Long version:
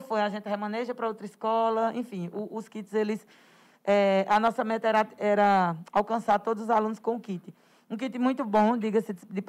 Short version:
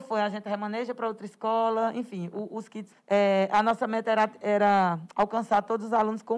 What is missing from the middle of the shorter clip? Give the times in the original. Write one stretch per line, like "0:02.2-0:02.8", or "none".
0:02.9-0:03.7